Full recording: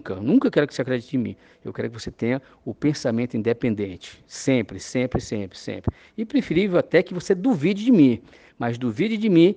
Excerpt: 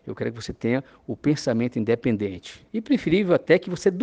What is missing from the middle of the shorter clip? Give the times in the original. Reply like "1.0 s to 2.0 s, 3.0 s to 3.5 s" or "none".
4.3 s to 6.1 s